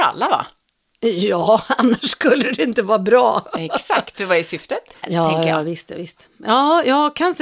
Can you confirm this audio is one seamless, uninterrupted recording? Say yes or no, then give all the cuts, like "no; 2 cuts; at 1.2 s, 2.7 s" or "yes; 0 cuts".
no; 1 cut; at 5.0 s